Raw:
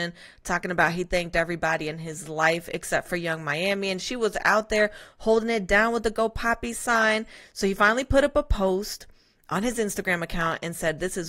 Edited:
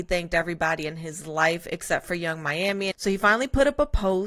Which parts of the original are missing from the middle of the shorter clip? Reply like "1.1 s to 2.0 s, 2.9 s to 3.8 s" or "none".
3.9 s to 7.5 s